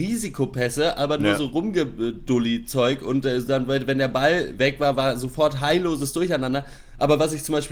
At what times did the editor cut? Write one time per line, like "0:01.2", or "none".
none